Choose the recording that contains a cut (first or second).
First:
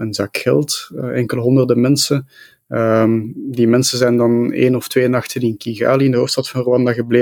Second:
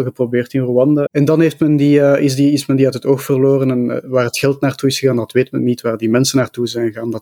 second